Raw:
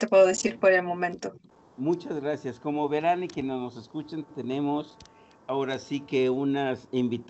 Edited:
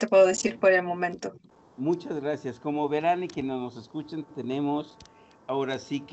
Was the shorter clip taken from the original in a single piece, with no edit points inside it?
yes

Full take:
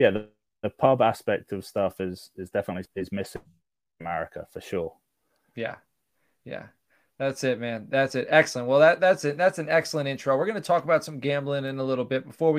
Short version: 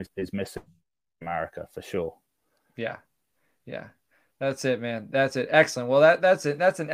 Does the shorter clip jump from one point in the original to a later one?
no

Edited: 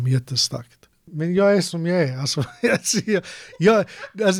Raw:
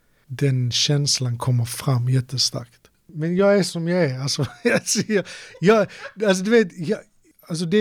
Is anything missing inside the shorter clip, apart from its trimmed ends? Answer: no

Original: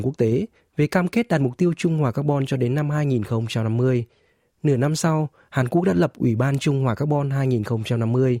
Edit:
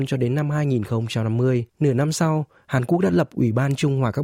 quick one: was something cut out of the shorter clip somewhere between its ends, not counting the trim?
yes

